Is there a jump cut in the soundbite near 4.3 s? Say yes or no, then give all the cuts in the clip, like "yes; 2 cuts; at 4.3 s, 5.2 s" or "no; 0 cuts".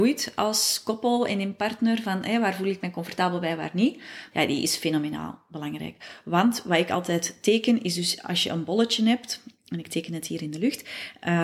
yes; 1 cut; at 4.3 s